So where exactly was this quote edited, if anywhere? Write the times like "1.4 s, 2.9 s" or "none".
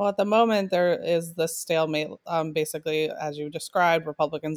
none